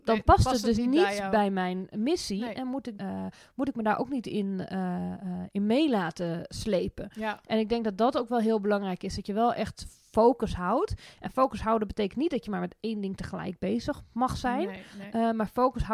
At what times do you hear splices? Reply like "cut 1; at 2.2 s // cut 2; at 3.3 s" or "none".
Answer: cut 1; at 3.0 s

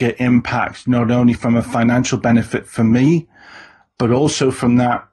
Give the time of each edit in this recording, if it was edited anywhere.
none

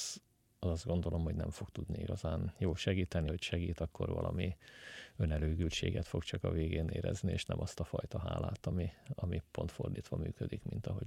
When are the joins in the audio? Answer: cut 1; at 3.3 s

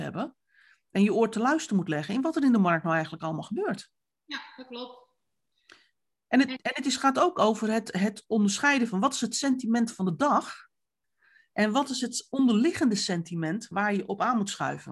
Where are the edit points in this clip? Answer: none

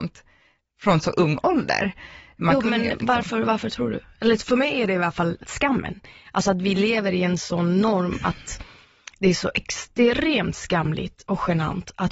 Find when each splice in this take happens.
none

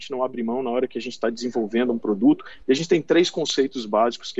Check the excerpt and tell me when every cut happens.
cut 1; at 2.6 s

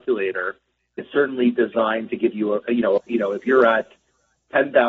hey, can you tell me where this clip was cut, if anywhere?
cut 1; at 3.0 s

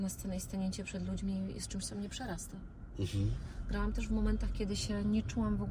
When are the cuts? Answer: none

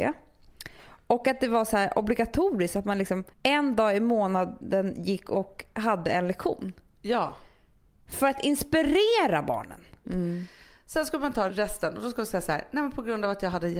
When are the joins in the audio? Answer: cut 1; at 3.3 s // cut 2; at 10.0 s

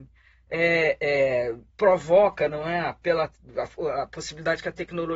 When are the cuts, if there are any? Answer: cut 1; at 1.7 s

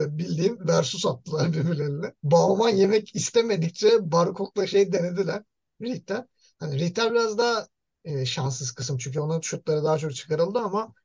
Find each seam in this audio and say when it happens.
cut 1; at 2.2 s

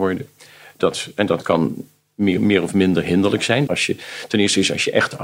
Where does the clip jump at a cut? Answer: cut 1; at 3.7 s

